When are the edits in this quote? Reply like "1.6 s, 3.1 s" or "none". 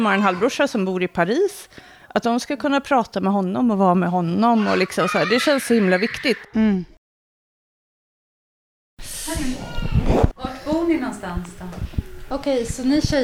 10.3 s, 12.3 s